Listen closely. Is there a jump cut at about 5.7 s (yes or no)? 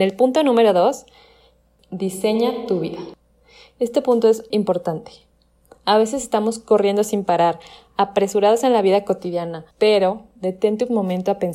no